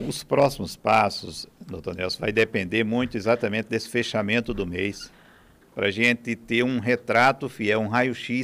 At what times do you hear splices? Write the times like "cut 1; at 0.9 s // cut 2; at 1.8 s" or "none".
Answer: none